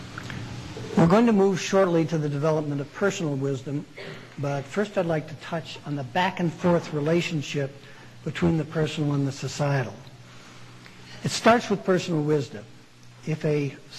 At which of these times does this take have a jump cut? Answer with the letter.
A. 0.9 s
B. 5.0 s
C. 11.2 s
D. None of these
D